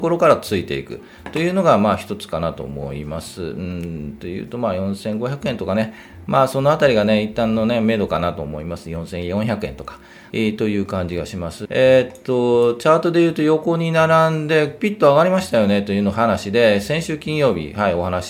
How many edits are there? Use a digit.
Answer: 2